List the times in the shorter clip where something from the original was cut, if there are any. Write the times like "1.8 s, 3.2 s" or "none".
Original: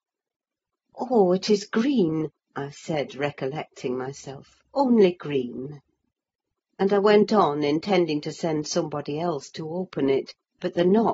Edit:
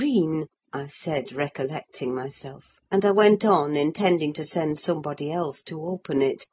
2.8 s